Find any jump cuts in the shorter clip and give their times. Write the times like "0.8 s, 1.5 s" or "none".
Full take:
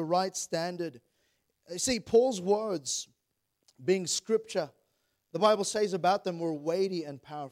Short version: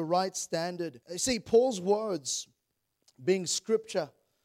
1.0 s